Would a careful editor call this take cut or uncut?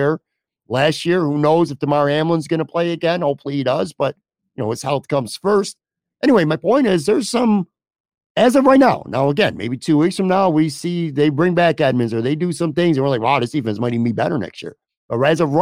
uncut